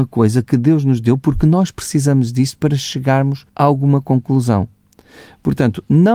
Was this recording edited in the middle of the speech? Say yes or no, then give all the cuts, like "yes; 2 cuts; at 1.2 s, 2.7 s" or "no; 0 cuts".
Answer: yes; 1 cut; at 3.5 s